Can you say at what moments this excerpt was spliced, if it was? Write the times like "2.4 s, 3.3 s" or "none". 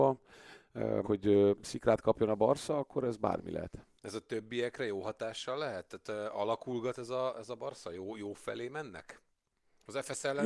1.0 s, 4.0 s